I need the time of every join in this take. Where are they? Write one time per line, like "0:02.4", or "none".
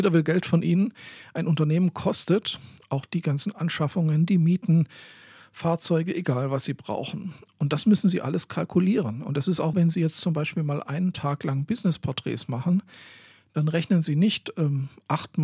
0:09.7